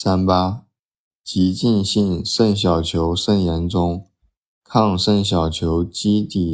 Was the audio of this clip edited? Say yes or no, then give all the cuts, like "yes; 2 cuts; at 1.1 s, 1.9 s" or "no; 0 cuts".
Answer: no; 0 cuts